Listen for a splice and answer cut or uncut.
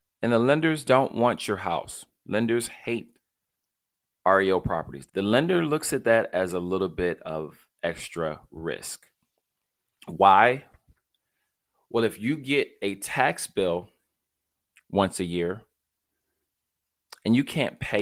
cut